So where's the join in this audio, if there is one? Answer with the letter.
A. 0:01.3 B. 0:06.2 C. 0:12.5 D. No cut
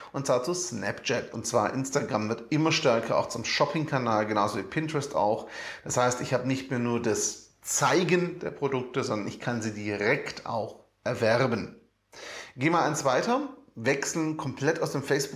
A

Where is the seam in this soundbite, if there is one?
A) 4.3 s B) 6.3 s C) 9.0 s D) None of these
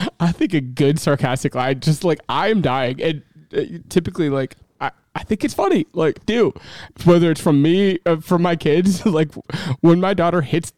B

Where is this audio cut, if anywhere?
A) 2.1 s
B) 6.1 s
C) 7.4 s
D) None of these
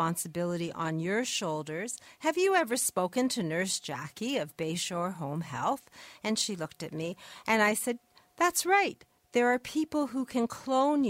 D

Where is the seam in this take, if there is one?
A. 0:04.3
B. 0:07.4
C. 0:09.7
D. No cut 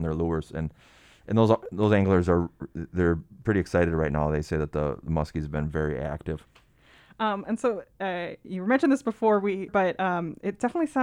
C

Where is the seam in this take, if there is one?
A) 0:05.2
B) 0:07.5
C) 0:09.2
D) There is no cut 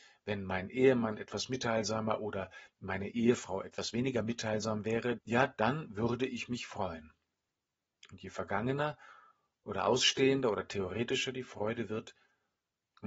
A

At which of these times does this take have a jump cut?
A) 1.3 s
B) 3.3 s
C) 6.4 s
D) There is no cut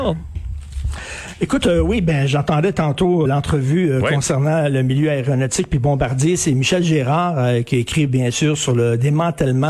B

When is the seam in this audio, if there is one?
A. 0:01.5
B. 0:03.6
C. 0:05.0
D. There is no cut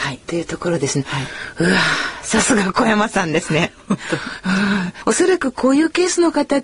D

